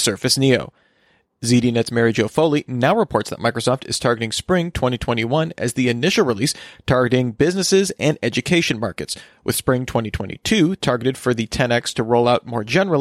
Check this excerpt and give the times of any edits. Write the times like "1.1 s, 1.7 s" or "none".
none